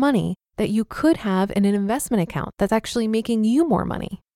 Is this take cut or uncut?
uncut